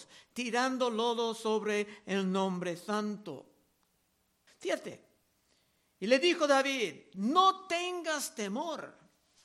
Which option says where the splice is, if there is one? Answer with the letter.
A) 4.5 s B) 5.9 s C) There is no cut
A